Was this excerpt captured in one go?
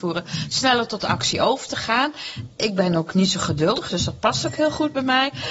yes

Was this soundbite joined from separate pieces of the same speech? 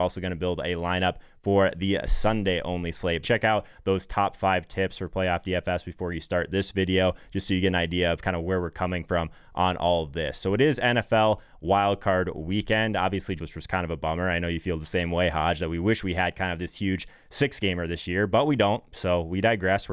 yes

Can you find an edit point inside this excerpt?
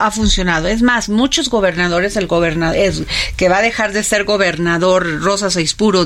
no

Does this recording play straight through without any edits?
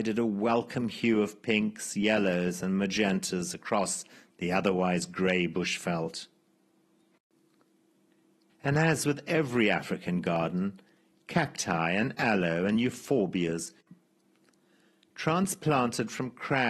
no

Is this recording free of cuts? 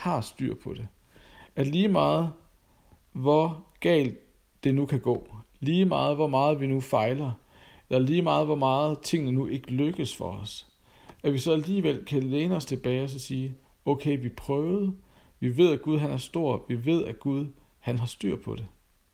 yes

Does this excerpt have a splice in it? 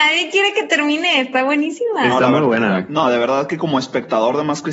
no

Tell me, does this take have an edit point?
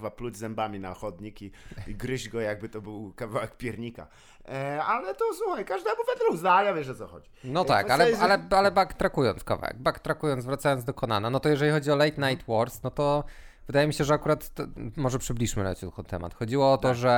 no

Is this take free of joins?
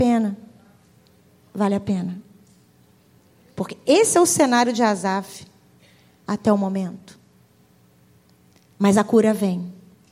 yes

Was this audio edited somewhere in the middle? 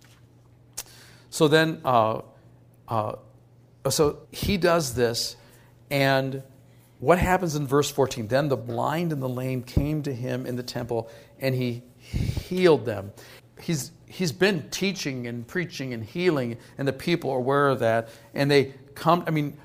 yes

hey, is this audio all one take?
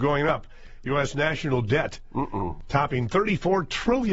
yes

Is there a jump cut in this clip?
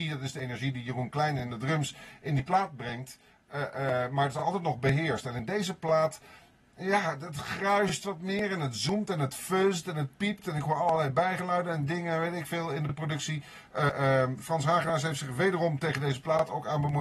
no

